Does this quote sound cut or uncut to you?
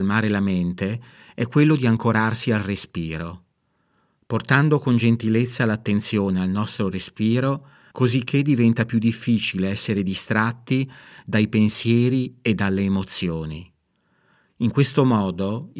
cut